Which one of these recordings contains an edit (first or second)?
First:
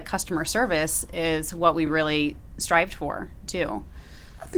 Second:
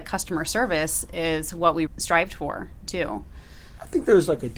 second